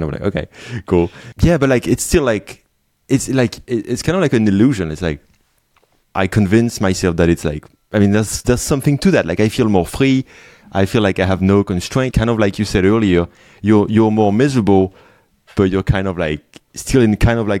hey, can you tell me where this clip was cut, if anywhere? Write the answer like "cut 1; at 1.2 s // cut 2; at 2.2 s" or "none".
cut 1; at 12.1 s